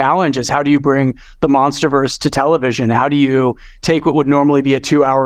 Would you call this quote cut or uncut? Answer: uncut